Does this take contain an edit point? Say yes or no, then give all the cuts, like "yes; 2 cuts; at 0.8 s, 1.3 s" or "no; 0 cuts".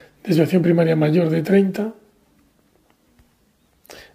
no; 0 cuts